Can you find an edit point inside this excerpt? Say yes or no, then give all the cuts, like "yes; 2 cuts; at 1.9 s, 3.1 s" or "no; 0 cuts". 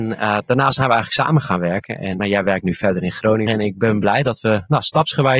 yes; 2 cuts; at 2.2 s, 3.5 s